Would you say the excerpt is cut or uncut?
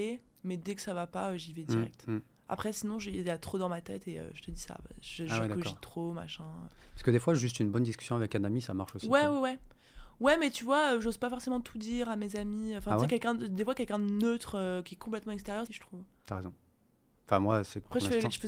cut